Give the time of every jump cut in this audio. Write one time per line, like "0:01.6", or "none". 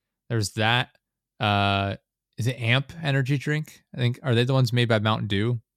none